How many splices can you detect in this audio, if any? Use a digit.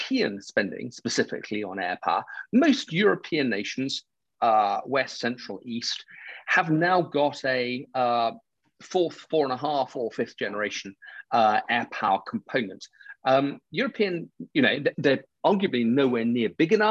0